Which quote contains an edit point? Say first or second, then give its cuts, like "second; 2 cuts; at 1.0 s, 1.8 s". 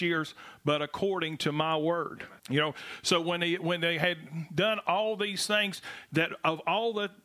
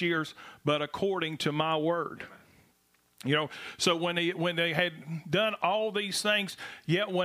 first; 2 cuts; at 2.4 s, 6.1 s